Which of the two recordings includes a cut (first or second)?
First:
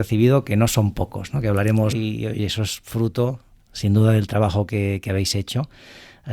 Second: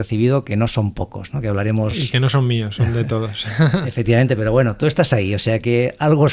first